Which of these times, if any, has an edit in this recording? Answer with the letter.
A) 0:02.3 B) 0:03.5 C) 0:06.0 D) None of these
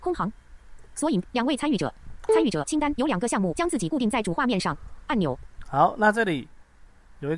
A